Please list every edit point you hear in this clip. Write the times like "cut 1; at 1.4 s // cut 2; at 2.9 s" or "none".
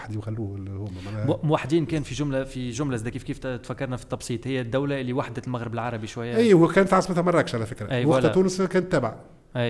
none